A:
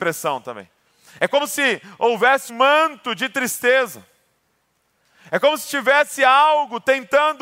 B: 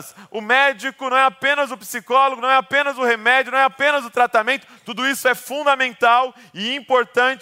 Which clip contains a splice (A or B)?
A